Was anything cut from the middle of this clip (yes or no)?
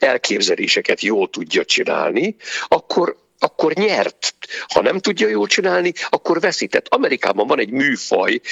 no